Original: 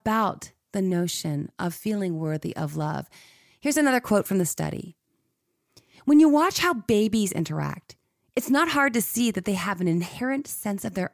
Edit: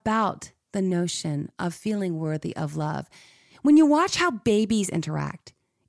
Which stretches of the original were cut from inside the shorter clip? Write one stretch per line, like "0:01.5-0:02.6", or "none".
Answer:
0:03.5-0:05.9